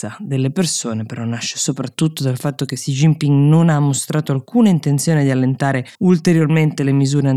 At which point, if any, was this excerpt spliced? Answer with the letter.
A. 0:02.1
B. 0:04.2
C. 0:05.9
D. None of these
C